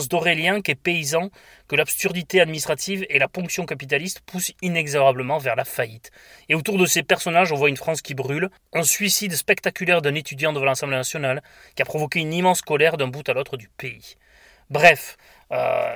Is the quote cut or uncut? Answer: uncut